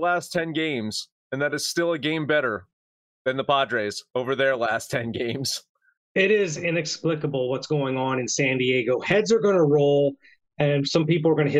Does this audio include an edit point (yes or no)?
yes